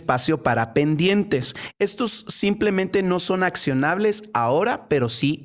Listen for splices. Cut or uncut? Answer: uncut